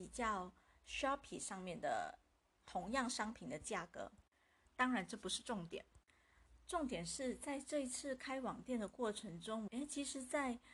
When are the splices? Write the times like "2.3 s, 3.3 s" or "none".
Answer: 4.6 s, 9.7 s